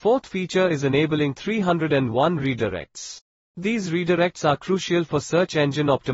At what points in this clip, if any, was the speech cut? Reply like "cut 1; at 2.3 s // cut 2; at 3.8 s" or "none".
none